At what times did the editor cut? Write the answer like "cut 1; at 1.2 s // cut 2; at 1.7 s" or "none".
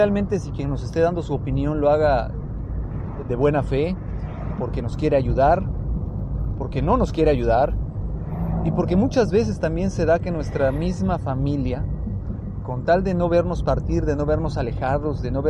none